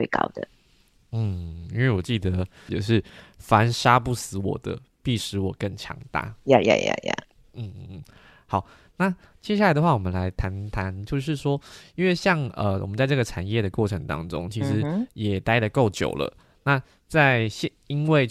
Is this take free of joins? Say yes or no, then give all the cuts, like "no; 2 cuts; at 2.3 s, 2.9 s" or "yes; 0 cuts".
no; 1 cut; at 2.7 s